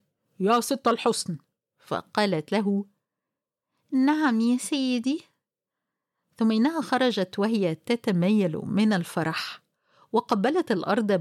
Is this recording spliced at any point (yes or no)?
no